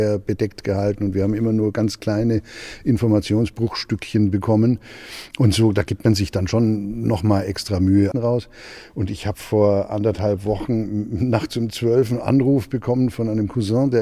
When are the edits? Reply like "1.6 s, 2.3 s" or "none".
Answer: 8.1 s